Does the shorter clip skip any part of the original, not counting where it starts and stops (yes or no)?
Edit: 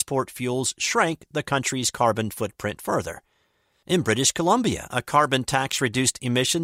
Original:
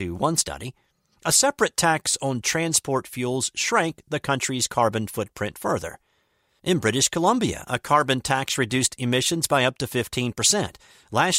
no